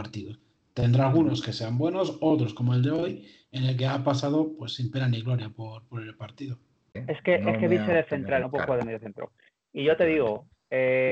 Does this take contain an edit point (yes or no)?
yes